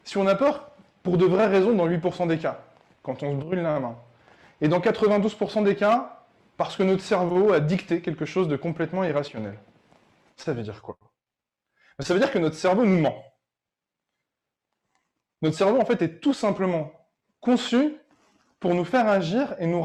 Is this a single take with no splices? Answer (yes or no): yes